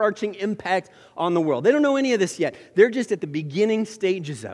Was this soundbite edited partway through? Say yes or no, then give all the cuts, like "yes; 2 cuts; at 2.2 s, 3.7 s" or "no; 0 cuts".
no; 0 cuts